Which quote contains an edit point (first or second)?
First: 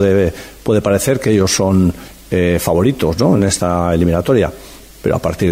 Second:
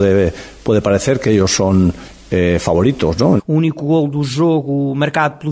second